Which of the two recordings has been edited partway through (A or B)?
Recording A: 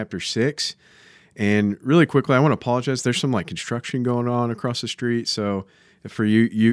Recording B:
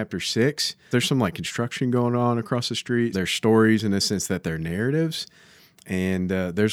B